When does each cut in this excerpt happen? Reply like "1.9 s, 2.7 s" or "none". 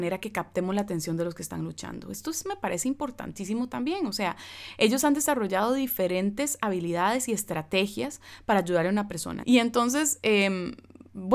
9.4 s